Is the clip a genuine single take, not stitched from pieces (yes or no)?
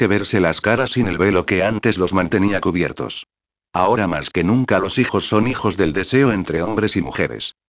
yes